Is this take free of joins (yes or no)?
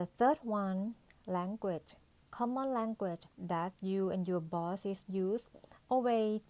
no